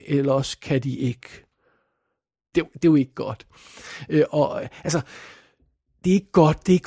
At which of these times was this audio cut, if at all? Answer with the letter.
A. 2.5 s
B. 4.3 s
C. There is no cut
A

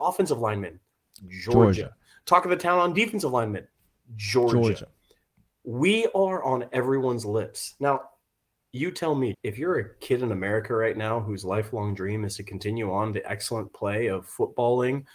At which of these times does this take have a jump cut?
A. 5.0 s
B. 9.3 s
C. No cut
B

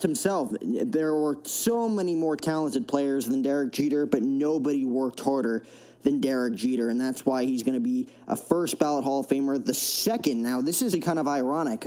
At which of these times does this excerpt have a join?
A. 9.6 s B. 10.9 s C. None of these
B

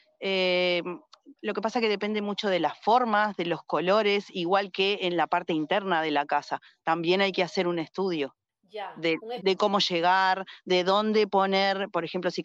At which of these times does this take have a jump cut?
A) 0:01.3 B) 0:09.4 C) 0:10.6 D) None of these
B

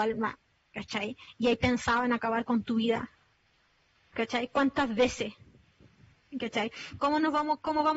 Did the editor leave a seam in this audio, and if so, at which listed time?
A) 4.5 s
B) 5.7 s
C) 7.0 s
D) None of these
C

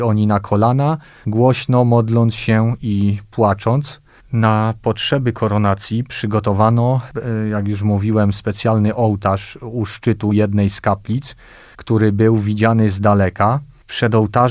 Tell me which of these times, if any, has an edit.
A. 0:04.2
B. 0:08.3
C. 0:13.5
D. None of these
A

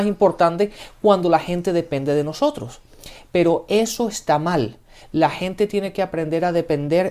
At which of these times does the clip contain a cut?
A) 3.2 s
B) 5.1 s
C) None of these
C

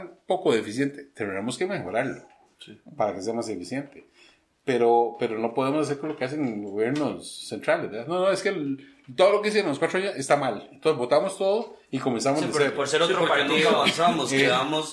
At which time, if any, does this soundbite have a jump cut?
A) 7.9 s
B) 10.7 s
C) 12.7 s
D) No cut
D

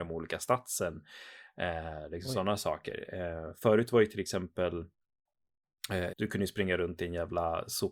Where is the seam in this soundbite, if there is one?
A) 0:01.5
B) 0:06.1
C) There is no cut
B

